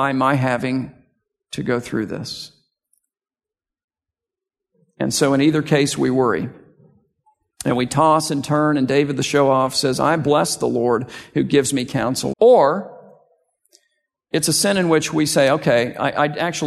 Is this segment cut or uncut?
cut